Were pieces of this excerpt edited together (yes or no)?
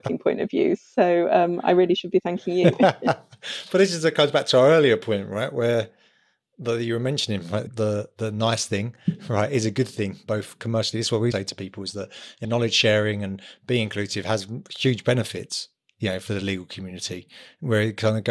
yes